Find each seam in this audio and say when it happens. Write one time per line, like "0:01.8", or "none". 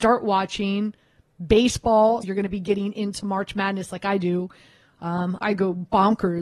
0:02.2
0:05.4

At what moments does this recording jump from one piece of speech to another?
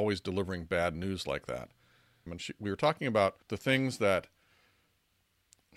0:02.3
0:03.4

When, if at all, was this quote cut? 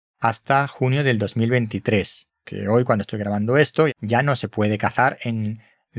0:02.4
0:03.9

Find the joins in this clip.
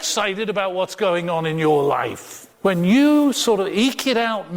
0:02.5

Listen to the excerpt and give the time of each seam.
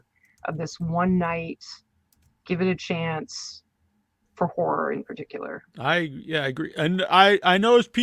none

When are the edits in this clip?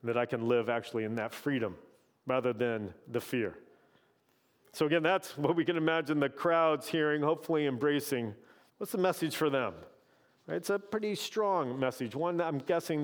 0:08.7

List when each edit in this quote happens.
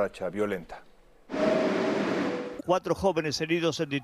0:02.6

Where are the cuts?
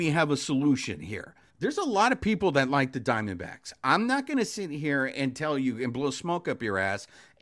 0:01.5

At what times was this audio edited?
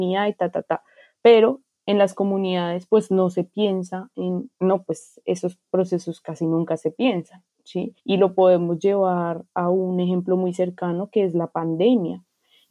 0:04.5
0:08.0

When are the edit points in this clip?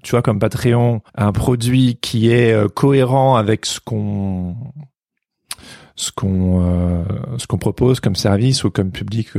0:01.1

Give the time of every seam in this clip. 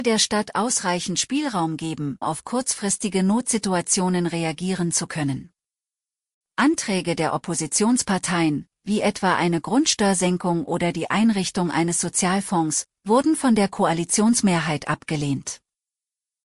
0:02.2

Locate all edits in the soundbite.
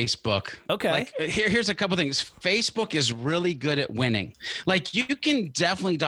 none

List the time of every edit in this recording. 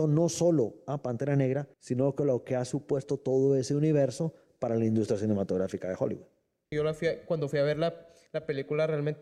0:01.7
0:06.7

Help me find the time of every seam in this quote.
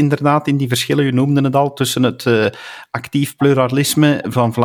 none

